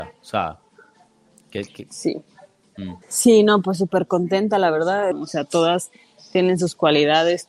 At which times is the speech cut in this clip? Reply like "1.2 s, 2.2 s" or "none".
3.0 s, 5.1 s